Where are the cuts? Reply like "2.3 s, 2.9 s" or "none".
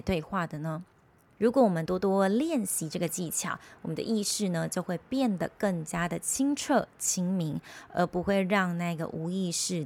none